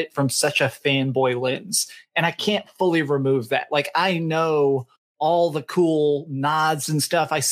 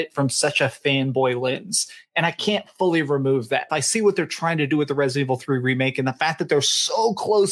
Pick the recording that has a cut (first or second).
second